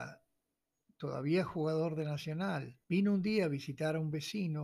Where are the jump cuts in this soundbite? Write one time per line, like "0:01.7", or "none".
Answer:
0:02.8